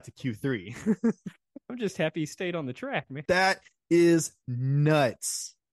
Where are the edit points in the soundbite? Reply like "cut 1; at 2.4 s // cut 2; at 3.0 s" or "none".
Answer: cut 1; at 3.2 s